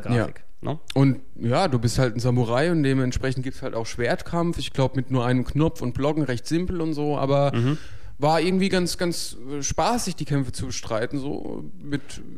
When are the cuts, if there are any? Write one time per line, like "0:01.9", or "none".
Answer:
none